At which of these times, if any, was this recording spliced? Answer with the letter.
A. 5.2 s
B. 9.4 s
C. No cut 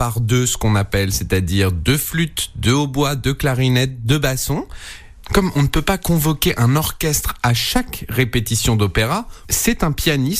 A